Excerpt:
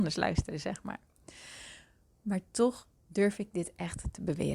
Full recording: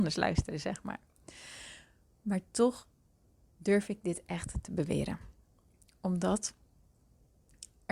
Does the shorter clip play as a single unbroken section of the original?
no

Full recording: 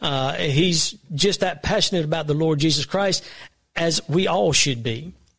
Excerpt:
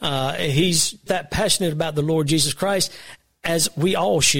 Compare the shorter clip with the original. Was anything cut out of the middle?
yes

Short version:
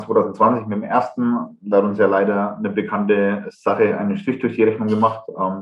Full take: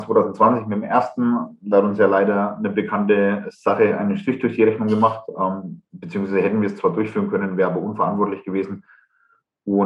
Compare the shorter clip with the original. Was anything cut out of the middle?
no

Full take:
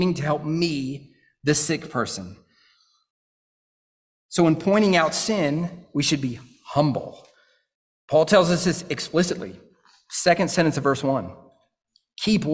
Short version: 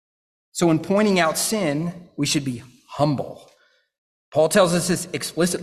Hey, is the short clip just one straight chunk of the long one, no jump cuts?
yes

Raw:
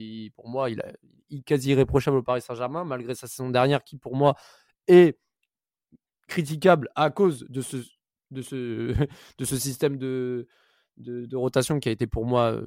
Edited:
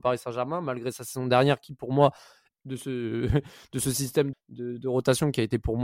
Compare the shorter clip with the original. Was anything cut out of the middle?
yes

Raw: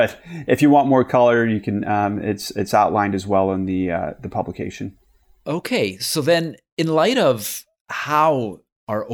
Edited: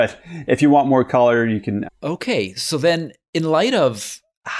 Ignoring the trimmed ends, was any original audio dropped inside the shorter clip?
yes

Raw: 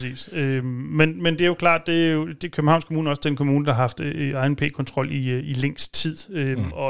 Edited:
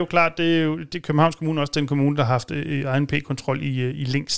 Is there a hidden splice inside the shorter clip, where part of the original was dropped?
no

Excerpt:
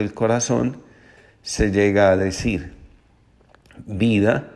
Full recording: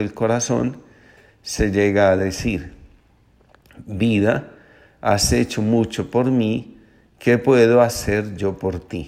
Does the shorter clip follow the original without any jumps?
yes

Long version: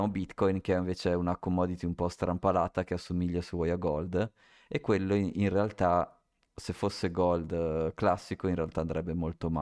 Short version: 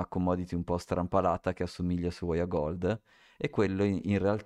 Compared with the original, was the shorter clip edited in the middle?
no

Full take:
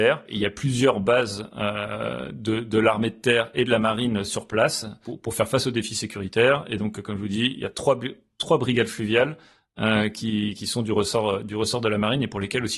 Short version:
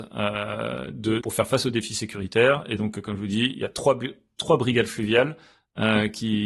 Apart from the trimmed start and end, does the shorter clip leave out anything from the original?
yes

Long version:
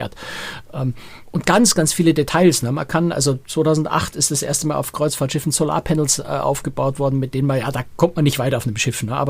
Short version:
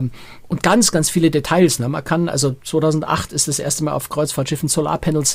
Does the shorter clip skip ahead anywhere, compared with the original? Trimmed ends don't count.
no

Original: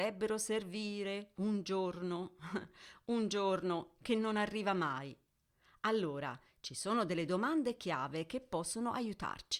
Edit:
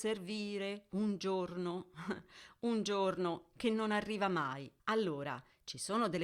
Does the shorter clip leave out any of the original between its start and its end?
yes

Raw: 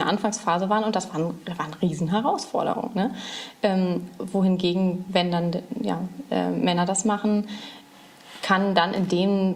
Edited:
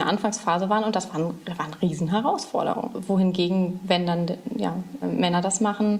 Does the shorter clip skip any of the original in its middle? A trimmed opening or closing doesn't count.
yes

